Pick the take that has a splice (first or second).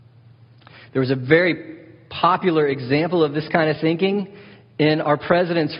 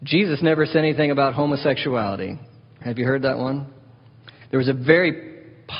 second